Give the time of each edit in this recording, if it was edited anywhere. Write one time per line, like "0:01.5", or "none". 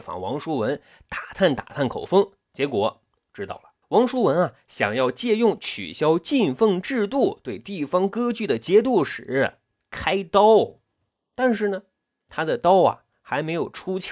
none